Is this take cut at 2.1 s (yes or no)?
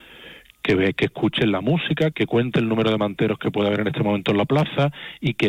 yes